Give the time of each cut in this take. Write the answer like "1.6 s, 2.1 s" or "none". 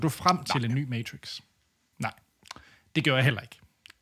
1.9 s